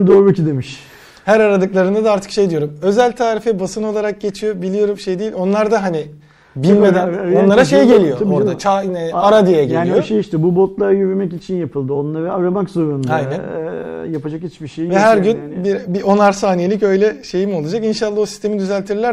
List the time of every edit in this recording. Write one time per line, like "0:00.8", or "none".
none